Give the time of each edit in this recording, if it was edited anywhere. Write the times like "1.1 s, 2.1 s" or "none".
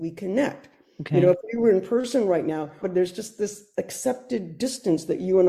2.8 s